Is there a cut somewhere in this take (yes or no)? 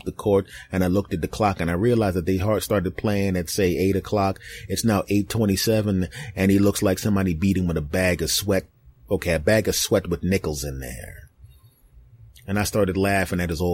no